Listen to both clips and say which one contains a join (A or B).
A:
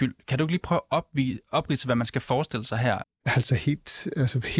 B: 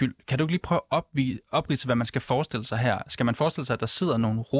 A